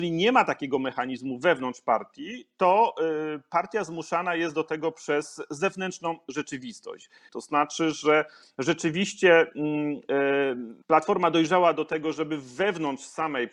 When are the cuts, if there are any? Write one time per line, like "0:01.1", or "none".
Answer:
0:07.3
0:10.8